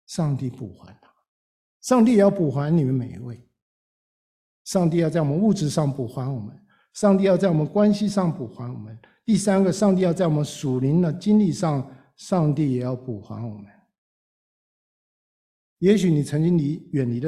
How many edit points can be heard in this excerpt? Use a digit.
0